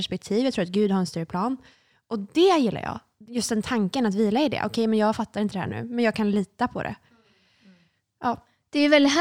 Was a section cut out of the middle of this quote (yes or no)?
no